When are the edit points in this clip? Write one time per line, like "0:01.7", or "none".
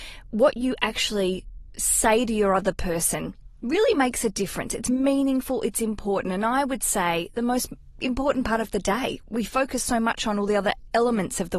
none